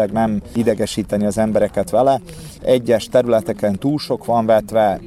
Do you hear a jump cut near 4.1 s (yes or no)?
no